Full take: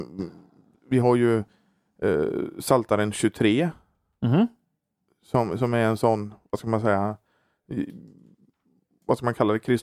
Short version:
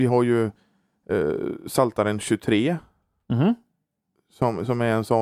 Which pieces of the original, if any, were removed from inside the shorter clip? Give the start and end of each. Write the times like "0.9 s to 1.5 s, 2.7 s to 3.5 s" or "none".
none